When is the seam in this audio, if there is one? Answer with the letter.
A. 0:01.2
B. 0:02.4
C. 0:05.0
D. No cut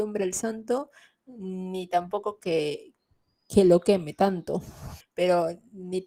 C